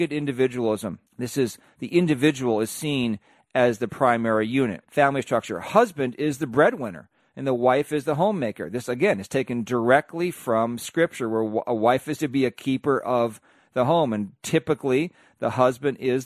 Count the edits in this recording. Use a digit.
2